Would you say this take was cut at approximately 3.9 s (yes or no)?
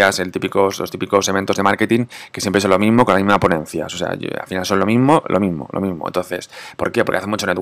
no